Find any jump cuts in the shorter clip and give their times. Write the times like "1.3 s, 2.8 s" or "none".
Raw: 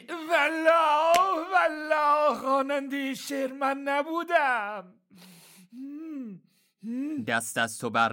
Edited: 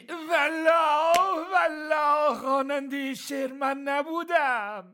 none